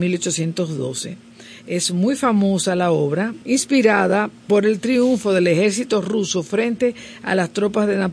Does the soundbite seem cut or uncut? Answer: cut